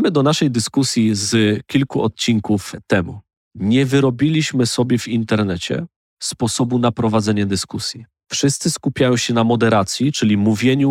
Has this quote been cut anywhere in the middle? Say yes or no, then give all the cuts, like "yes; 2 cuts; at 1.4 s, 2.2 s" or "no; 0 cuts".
no; 0 cuts